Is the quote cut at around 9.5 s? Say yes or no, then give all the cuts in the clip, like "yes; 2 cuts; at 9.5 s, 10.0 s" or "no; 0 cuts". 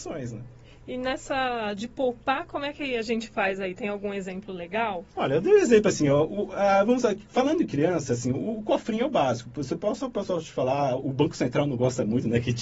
no; 1 cut; at 5.1 s